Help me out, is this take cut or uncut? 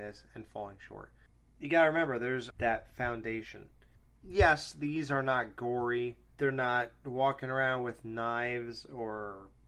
cut